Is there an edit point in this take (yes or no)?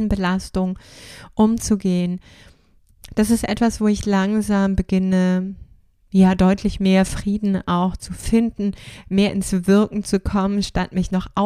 no